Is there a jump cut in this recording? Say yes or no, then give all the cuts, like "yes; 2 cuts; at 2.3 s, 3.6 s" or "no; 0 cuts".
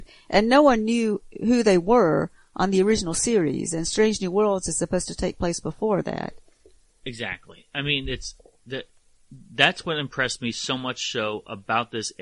no; 0 cuts